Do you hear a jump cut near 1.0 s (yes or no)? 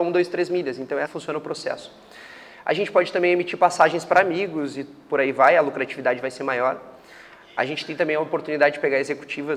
yes